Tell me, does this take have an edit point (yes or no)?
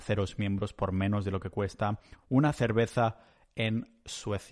no